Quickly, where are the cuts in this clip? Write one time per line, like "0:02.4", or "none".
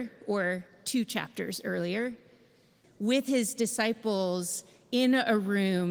0:02.8